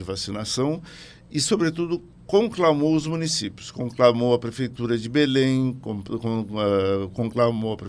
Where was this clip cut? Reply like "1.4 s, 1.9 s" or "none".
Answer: none